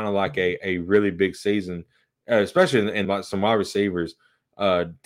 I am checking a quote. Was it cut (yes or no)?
yes